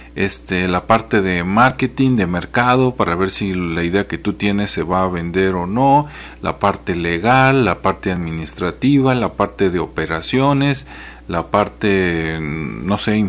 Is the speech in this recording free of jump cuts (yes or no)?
yes